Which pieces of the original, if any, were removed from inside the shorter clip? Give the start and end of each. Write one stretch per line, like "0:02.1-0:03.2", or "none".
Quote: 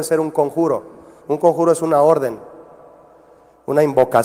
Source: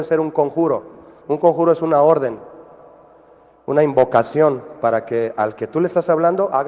none